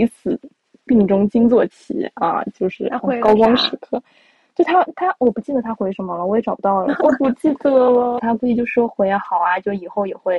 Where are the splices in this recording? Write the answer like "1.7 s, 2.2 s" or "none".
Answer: 7.0 s, 8.2 s